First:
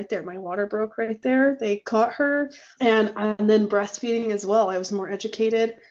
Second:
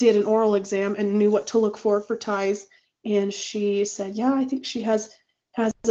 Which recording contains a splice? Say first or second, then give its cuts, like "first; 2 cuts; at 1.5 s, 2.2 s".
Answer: first; 1 cut; at 2.8 s